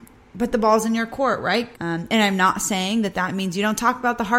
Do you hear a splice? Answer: yes; 1 cut; at 1.7 s

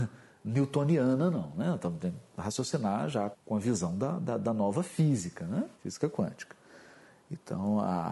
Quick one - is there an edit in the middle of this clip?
yes; 2 cuts; at 3.3 s, 5.7 s

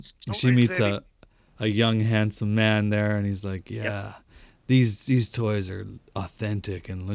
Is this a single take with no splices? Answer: yes; 0 cuts

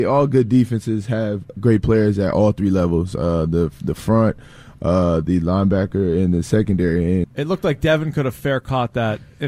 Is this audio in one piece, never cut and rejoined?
no; 1 cut; at 7.2 s

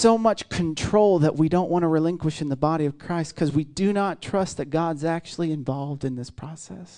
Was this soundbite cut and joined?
no; 0 cuts

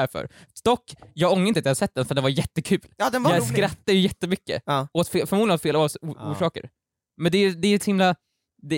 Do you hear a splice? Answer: no; 0 cuts

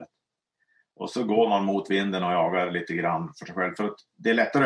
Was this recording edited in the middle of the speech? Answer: no; 0 cuts

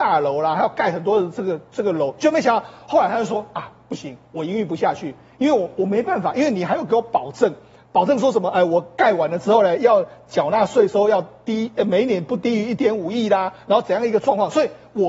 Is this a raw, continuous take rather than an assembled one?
yes; 0 cuts

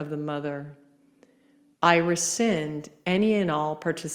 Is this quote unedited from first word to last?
no; 1 cut; at 1.7 s

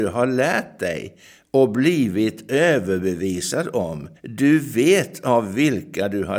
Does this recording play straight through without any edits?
no; 1 cut; at 4.2 s

